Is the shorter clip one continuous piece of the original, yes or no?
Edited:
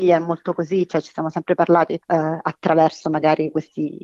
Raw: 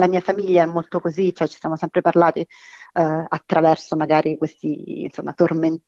no